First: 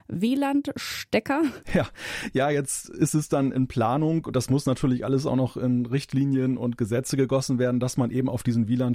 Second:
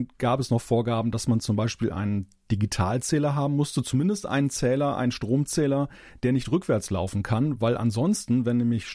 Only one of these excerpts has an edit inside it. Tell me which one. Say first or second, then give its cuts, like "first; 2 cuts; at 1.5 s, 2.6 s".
first; 1 cut; at 1.6 s